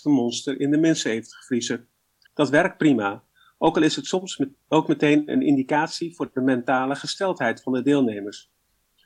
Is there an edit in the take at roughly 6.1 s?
no; 1 cut; at 2.3 s

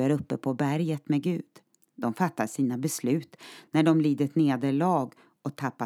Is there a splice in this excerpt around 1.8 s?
yes; 1 cut; at 1.8 s

